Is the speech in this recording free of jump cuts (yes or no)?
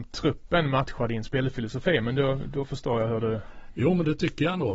yes